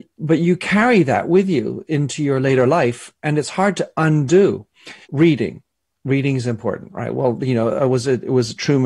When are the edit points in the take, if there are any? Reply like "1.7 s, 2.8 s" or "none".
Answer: 5.0 s